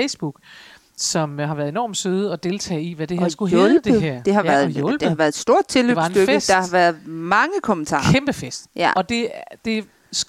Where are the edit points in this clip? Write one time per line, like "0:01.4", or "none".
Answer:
none

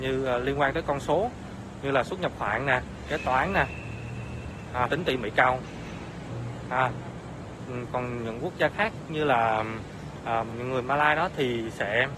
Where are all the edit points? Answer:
0:04.9
0:07.9
0:10.5

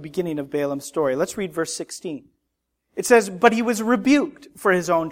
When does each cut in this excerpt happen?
none

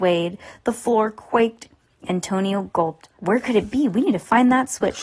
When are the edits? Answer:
0:03.2

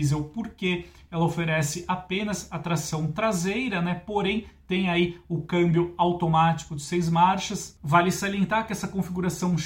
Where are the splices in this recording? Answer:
none

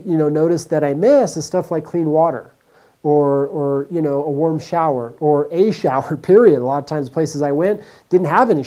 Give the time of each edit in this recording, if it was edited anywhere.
none

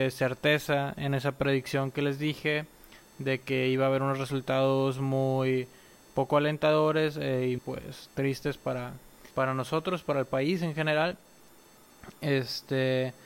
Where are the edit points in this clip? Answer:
0:07.6
0:09.3

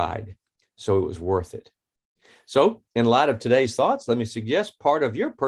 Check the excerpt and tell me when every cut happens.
none

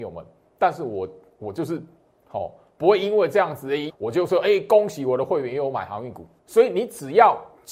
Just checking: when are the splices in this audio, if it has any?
0:03.9
0:06.4

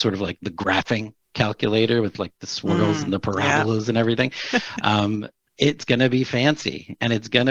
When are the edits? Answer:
none

